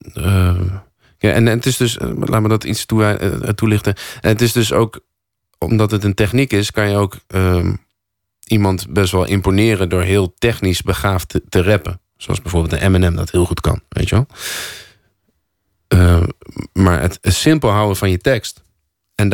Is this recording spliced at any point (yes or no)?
no